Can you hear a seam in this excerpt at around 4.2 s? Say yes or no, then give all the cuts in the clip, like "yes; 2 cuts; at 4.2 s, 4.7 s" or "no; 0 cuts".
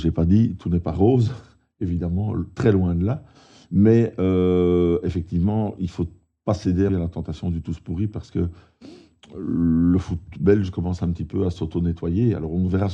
no; 1 cut; at 6.9 s